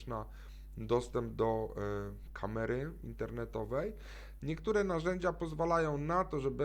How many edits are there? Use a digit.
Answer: 1